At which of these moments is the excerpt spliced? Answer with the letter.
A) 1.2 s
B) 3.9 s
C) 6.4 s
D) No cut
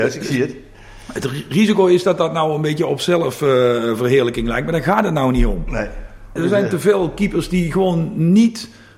C